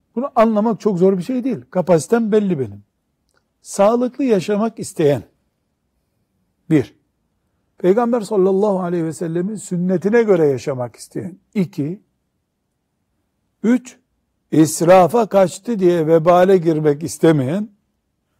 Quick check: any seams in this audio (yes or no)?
no